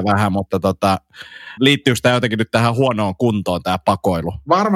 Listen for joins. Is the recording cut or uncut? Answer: cut